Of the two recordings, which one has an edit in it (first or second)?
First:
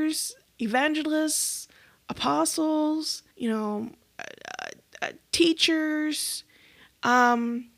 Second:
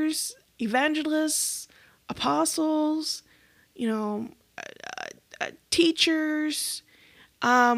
first